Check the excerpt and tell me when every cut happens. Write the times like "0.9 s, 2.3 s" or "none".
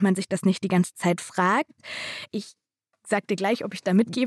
2.3 s